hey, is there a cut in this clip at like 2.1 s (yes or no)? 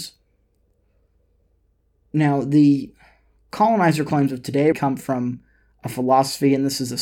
yes